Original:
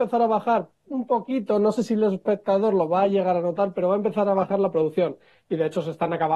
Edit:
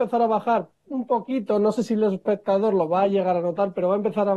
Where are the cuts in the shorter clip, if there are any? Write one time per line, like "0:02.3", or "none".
none